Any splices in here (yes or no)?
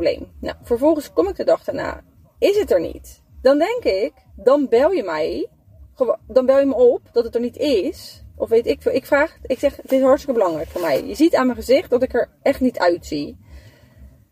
no